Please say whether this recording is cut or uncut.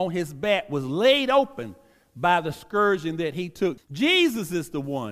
cut